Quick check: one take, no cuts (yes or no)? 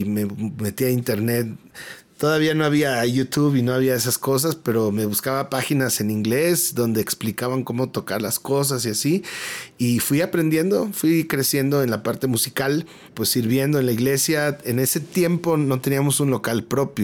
yes